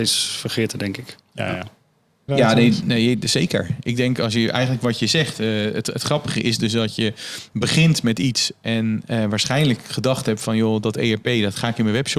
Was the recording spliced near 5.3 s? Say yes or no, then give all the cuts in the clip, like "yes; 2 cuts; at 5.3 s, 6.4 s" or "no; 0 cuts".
no; 1 cut; at 2.3 s